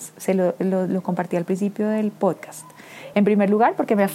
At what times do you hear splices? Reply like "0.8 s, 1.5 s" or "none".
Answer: none